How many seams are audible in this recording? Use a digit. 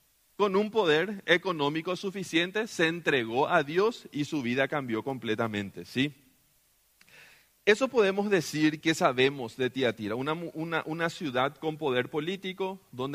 1